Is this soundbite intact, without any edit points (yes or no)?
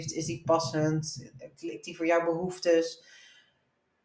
yes